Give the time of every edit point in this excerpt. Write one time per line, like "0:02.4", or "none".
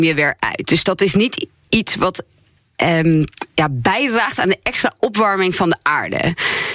none